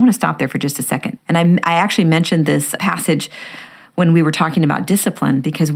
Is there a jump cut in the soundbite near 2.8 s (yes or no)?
yes